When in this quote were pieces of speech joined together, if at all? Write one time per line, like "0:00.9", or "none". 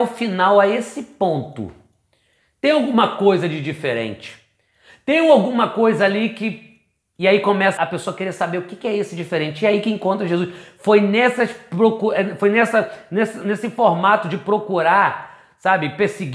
0:07.8